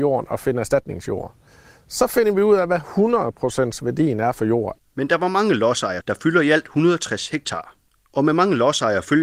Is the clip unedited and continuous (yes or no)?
no